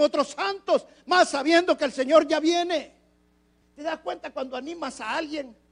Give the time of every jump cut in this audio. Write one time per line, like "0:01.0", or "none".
0:03.6